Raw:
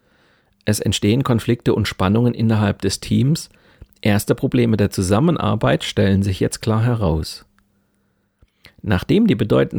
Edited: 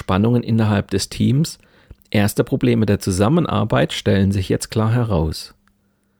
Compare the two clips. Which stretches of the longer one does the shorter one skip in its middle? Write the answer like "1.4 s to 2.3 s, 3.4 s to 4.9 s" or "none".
none

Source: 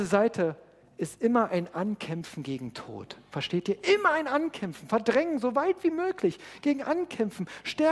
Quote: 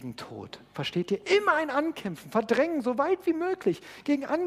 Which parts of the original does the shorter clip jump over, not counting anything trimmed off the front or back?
none

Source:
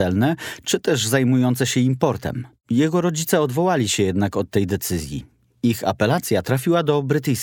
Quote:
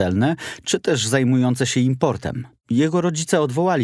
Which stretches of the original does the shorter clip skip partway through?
none

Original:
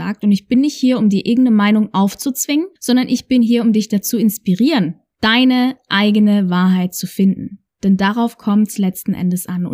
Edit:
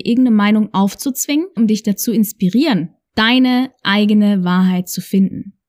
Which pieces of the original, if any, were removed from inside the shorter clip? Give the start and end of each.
2.8 s to 3.6 s

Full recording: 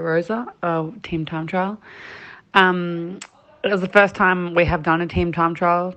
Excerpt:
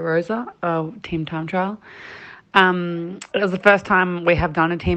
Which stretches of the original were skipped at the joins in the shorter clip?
3.3 s to 3.6 s

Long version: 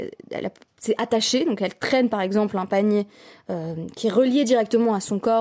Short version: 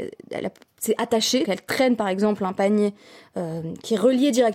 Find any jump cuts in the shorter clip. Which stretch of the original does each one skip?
1.4 s to 1.6 s

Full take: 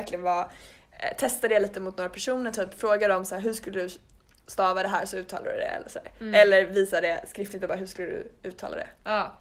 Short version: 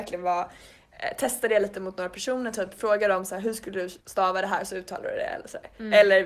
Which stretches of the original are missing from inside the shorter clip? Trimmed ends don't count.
4.0 s to 4.4 s

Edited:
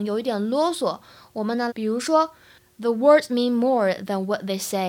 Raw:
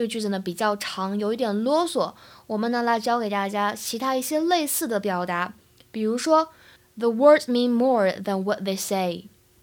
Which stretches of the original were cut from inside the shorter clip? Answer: 2.8 s to 5.9 s

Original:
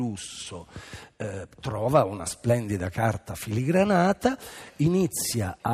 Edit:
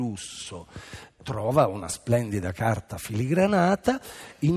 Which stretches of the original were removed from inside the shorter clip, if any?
1.2 s to 1.5 s

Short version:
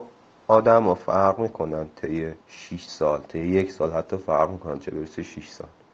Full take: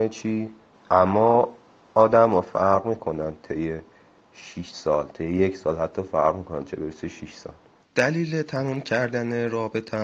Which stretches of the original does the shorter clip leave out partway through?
3.9 s to 4.3 s

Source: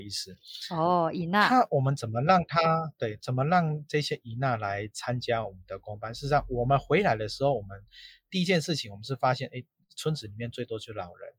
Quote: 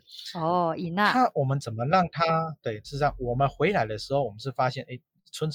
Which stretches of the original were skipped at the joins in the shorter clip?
3.2 s to 6.1 s, 7.6 s to 8.9 s

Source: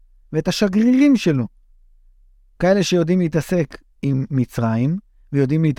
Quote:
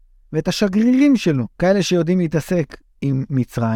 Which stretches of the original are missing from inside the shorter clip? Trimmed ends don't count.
1.5 s to 2.5 s

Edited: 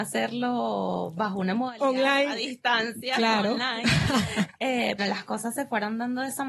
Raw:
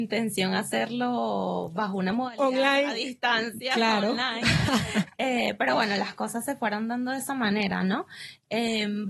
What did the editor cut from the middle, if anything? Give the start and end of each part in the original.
5.6 s to 5.9 s

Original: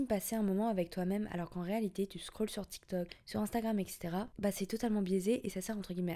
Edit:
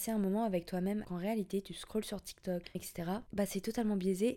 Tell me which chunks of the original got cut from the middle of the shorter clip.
1.3 s to 1.5 s, 3.2 s to 3.8 s

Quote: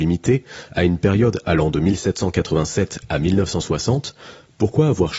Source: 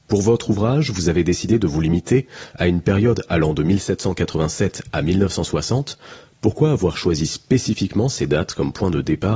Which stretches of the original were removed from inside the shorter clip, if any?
none

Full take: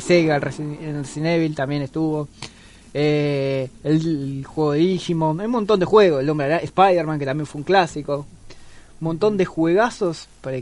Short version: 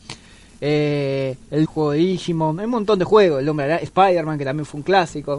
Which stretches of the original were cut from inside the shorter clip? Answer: 4.0 s to 4.5 s

